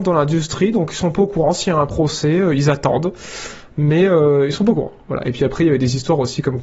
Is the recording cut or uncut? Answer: uncut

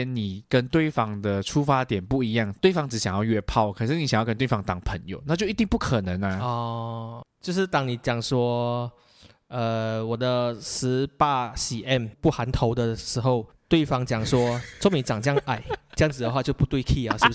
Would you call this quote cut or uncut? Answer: uncut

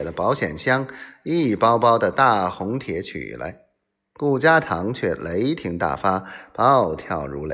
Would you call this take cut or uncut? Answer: cut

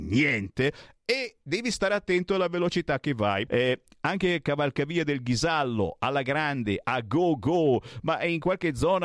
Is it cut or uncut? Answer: cut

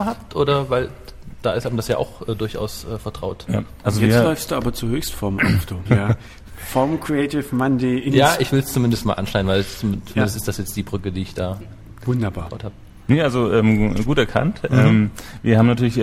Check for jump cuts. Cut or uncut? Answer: cut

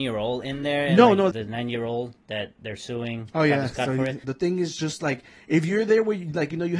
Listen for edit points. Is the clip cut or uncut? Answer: cut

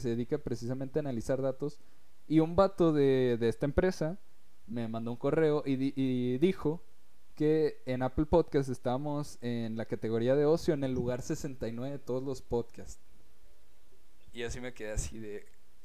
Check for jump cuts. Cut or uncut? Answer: cut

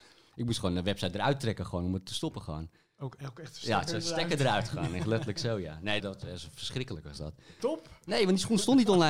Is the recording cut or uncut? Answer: cut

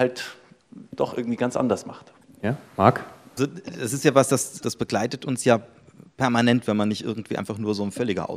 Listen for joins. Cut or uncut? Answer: uncut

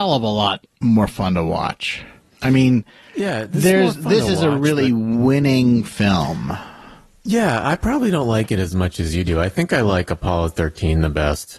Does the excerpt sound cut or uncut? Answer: uncut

